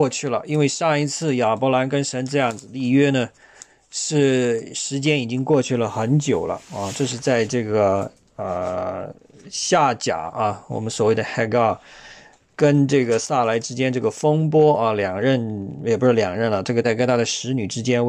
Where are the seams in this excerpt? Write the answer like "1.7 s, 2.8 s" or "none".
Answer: 16.8 s